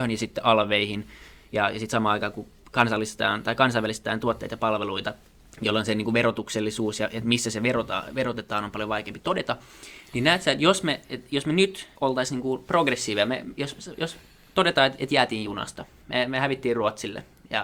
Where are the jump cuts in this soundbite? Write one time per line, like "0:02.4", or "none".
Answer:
0:12.0